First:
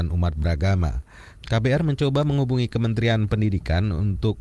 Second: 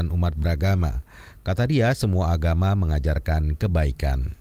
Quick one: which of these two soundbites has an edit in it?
first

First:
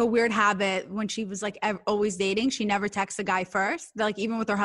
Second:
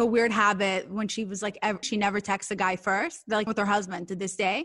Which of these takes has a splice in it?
second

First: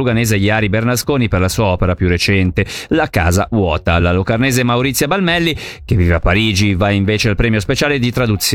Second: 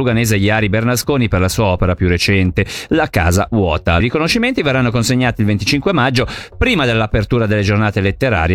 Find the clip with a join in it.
second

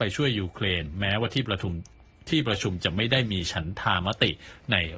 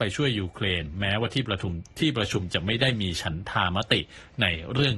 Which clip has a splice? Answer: second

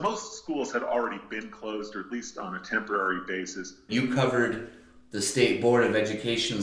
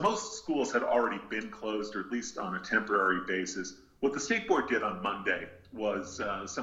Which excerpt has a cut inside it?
first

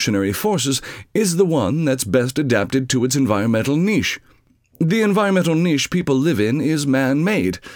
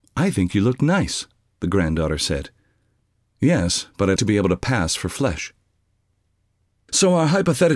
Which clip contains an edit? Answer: second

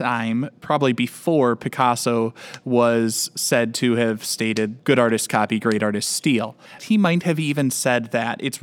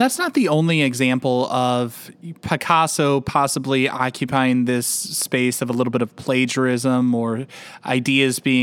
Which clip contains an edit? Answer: first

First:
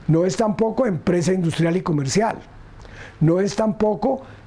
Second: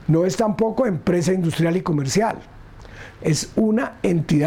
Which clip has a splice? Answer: second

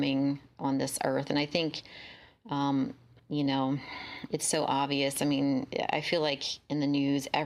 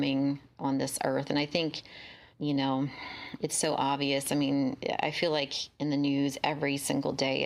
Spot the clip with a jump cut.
second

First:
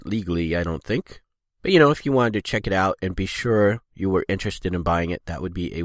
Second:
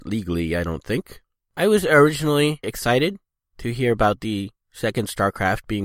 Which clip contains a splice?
second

